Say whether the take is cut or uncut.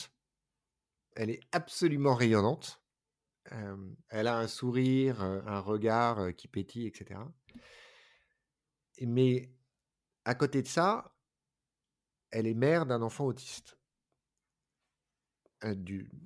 uncut